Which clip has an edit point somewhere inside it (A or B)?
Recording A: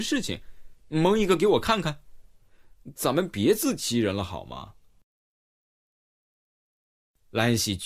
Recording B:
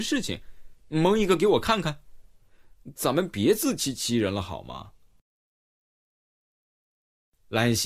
A